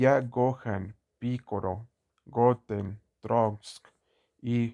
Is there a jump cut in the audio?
yes; 1 cut; at 2.1 s

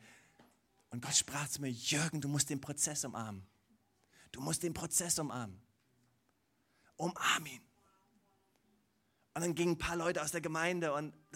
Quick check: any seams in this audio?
no; 0 cuts

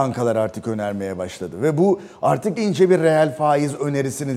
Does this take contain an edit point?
yes; 1 cut; at 2.6 s

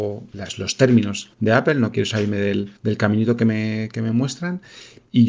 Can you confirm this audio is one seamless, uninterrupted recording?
yes; 0 cuts

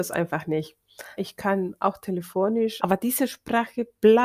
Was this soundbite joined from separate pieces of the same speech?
yes; 2 cuts; at 1.2 s, 2.8 s

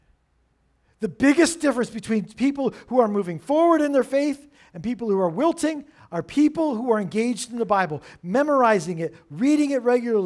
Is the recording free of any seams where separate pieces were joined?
yes; 0 cuts

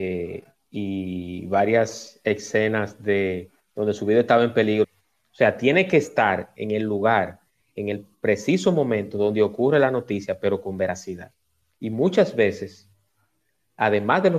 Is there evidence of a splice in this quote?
yes; 1 cut; at 4.8 s

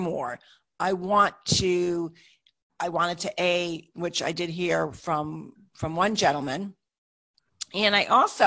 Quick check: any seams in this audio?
yes; 1 cut; at 3.9 s

